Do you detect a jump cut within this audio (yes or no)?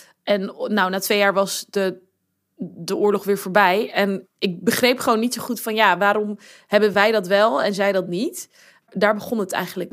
yes